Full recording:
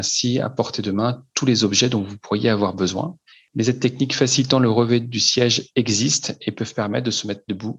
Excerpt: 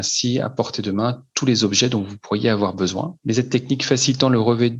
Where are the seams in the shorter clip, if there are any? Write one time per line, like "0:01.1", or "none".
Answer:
0:03.2

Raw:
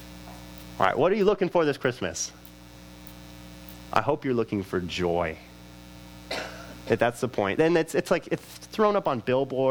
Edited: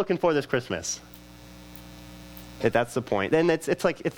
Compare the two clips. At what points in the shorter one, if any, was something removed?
0:02.6

